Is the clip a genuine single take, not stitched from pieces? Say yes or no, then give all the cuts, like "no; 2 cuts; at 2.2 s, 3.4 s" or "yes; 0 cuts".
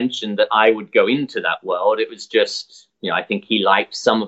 yes; 0 cuts